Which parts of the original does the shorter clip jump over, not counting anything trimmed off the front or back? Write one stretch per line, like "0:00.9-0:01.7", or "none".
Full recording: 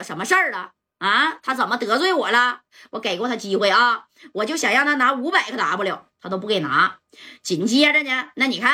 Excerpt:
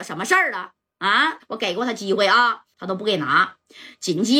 0:01.4-0:02.8
0:04.1-0:06.1